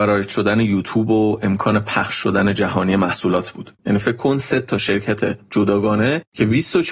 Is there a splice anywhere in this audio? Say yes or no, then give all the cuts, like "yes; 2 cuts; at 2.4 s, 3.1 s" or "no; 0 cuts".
yes; 1 cut; at 3.8 s